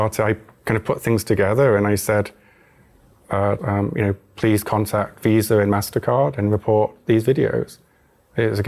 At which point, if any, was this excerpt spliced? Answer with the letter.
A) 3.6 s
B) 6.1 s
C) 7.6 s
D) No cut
A